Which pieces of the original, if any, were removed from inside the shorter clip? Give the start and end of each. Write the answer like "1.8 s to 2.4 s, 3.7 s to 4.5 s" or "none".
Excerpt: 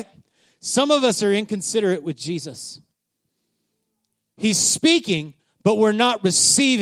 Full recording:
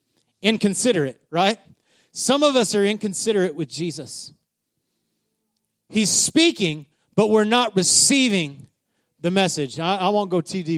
none